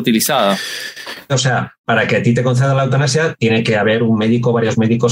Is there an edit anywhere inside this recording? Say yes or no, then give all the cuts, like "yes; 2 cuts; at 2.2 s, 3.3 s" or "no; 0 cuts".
yes; 1 cut; at 1.3 s